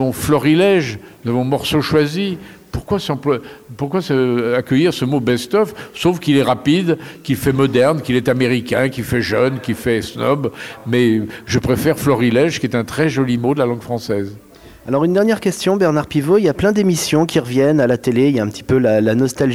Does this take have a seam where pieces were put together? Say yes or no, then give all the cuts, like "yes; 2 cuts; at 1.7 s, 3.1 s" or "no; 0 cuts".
no; 0 cuts